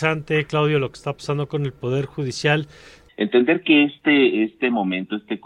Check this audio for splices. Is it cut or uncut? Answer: cut